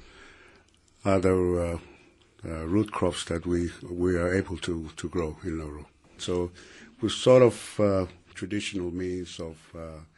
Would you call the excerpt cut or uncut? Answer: cut